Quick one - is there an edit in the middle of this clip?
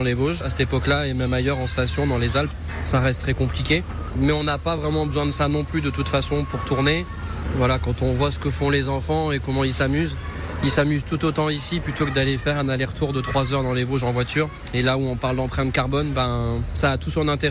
no; 0 cuts

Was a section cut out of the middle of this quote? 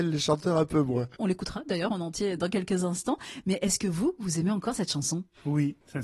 yes; 1 cut; at 1.2 s

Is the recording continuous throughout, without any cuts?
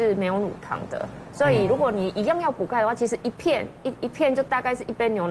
yes; 0 cuts

